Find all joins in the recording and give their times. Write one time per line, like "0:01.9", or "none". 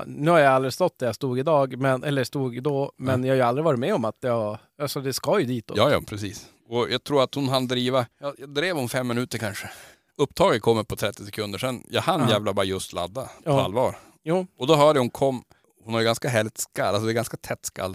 0:08.1